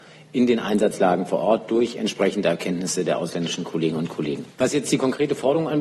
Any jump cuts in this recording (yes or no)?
yes